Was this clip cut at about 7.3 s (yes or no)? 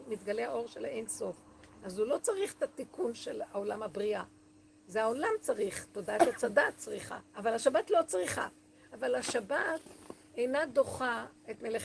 yes